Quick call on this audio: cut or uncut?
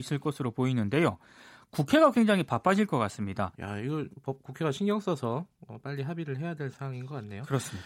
cut